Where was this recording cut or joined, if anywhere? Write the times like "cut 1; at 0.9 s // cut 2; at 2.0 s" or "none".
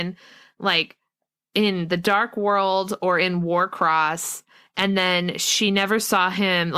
none